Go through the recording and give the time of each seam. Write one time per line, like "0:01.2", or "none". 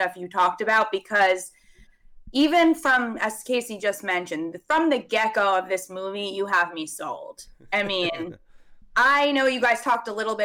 none